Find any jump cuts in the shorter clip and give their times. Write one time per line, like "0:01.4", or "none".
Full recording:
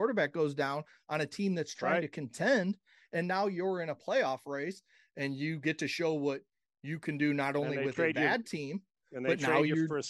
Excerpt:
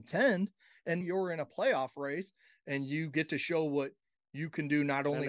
0:01.0